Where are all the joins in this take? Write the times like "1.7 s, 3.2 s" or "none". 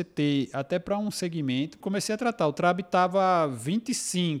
1.8 s